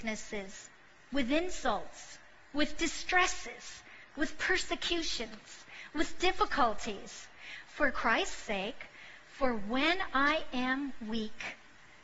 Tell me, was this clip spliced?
no; 0 cuts

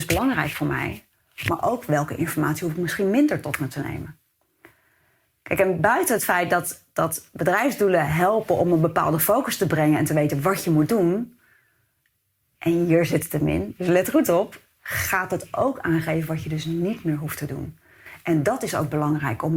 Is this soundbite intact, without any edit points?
yes; 0 cuts

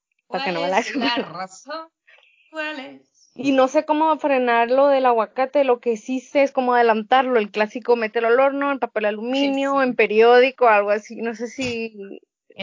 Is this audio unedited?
yes; 0 cuts

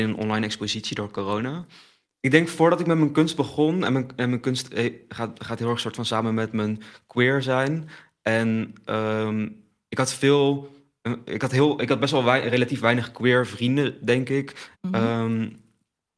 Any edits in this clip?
yes; 2 cuts; at 2.1 s, 14.7 s

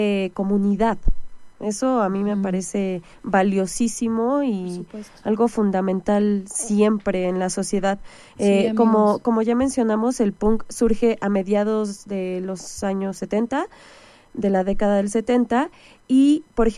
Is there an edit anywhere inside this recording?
no; 0 cuts

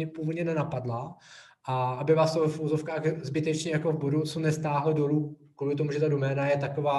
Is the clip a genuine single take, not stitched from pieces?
yes; 0 cuts

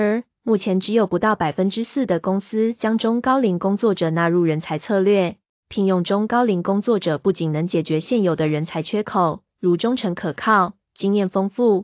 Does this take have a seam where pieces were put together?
yes; 2 cuts; at 5.6 s, 9.5 s

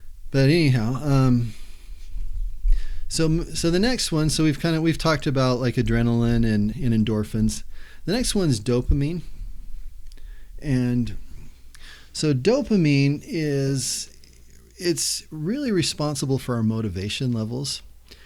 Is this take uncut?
no; 1 cut; at 6.7 s

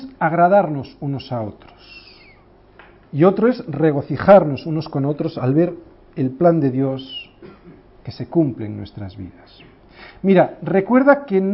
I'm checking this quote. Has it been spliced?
no; 0 cuts

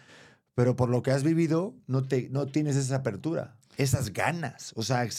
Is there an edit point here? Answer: no; 0 cuts

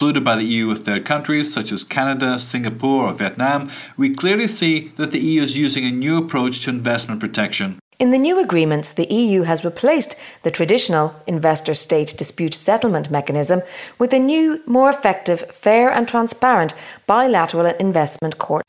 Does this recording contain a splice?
no; 0 cuts

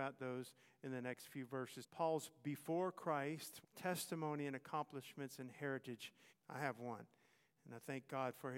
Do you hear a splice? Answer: yes; 3 cuts; at 1.8 s, 3.6 s, 6.3 s

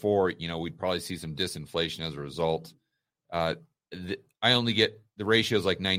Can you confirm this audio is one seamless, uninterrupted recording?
yes; 0 cuts

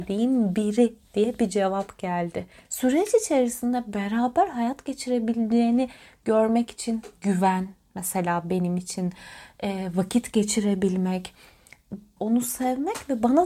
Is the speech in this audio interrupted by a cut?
yes; 2 cuts; at 2.6 s, 12.2 s

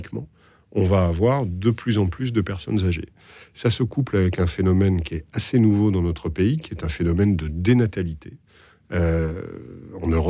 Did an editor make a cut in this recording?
no; 0 cuts

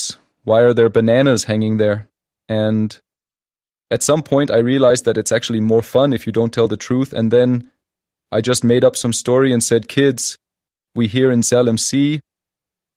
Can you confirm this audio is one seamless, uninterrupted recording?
yes; 0 cuts

